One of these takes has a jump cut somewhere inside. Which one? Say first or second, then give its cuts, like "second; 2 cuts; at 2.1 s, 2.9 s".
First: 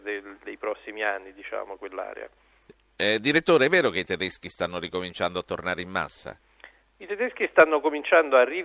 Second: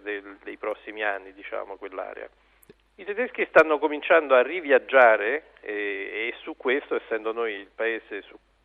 second; 1 cut; at 2.9 s